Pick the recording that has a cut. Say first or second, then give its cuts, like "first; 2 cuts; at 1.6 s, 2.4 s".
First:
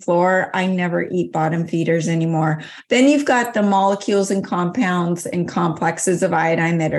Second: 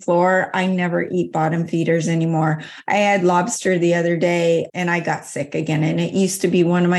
first; 1 cut; at 2.8 s